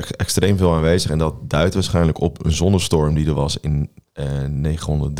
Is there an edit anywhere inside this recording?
no; 0 cuts

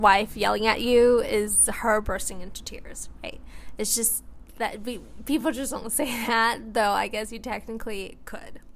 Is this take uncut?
yes; 0 cuts

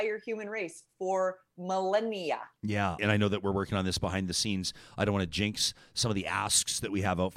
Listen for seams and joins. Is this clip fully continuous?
no; 1 cut; at 3.0 s

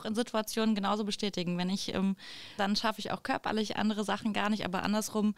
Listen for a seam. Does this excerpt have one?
yes; 1 cut; at 2.6 s

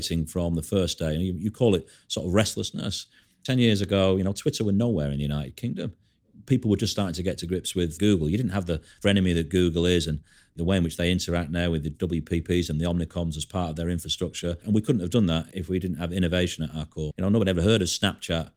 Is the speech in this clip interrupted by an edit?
yes; 2 cuts; at 14.6 s, 17.1 s

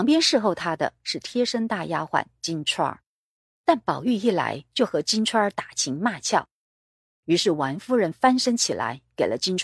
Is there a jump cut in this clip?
no; 0 cuts

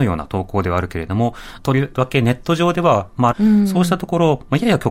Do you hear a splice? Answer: yes; 2 cuts; at 1.6 s, 3.3 s

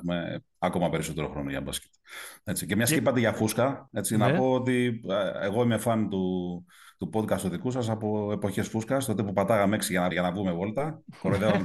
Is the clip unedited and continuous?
no; 1 cut; at 10.1 s

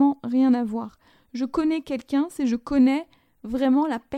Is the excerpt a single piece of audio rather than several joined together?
yes; 0 cuts

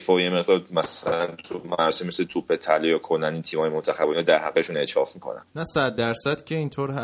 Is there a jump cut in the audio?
yes; 1 cut; at 5.5 s

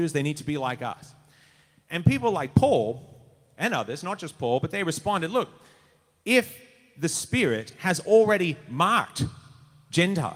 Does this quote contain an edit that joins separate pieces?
no; 0 cuts

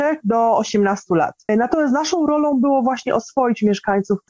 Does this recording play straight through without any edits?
no; 1 cut; at 1.5 s

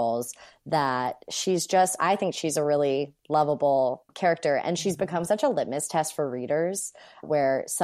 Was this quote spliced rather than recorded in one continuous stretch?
no; 0 cuts

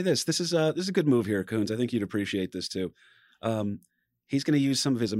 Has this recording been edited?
no; 0 cuts

